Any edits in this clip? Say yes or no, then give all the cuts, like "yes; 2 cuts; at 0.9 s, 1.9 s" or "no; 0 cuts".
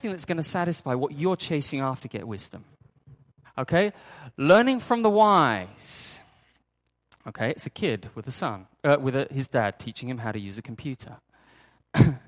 yes; 1 cut; at 3.4 s